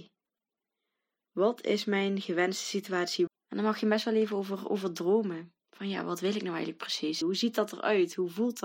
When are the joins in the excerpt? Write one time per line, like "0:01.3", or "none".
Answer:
0:03.3
0:05.6
0:07.2